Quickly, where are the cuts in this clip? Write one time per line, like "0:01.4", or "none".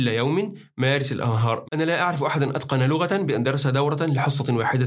0:01.6